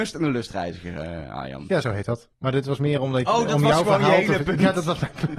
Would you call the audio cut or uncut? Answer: cut